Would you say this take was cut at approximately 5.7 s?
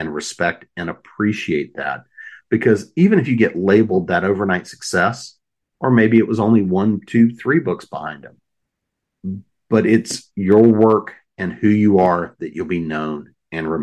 yes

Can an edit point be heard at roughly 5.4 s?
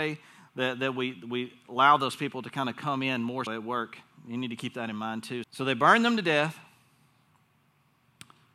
yes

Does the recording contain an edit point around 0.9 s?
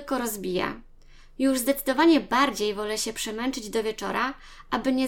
no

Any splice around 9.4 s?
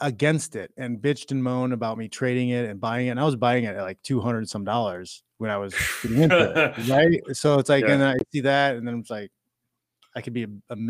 no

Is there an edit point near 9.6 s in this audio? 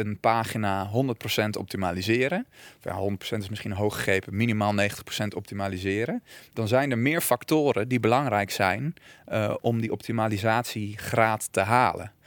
yes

